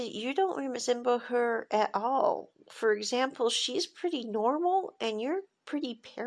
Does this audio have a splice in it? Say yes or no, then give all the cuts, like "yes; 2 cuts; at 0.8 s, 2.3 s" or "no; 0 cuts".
no; 0 cuts